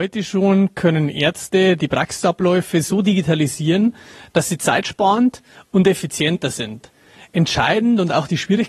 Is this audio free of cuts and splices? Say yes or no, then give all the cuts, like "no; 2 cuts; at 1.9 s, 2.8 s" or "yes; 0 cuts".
yes; 0 cuts